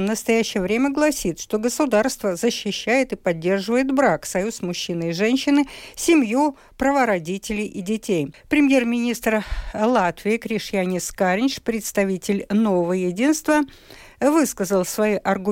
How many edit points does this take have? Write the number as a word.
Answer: one